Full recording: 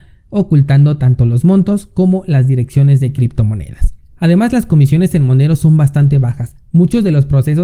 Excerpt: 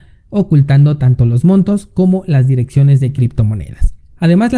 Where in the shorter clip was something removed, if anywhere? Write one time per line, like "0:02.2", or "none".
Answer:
none

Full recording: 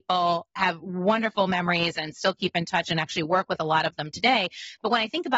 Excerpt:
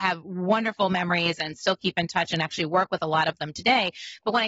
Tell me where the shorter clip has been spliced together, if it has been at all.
none

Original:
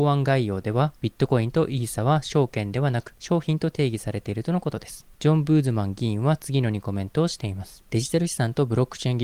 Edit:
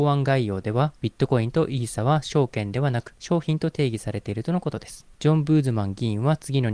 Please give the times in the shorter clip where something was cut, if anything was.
none

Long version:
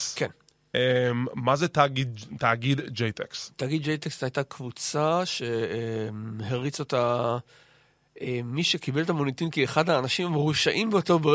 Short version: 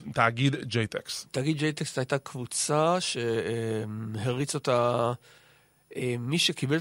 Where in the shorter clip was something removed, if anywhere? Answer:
none

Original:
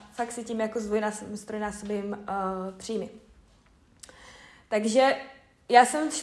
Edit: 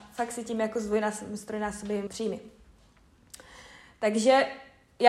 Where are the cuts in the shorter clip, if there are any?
0:02.1

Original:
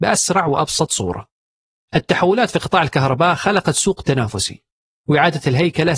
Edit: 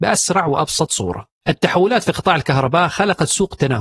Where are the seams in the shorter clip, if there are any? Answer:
0:01.4

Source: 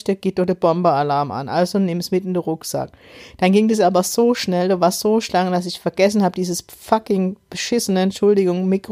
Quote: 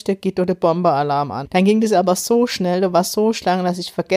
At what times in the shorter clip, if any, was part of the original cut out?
0:01.5

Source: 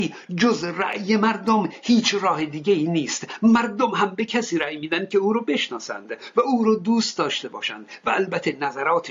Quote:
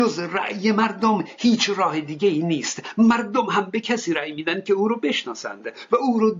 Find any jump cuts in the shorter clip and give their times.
none

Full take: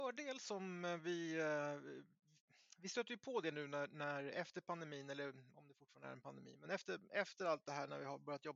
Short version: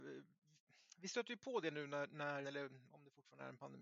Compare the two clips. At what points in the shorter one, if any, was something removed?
0:02.4

